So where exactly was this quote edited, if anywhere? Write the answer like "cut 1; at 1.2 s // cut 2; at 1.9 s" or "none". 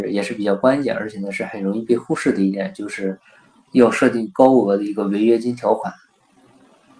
none